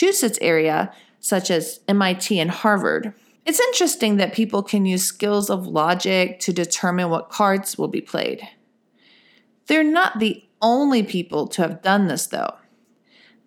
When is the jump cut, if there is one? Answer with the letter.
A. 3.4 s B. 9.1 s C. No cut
A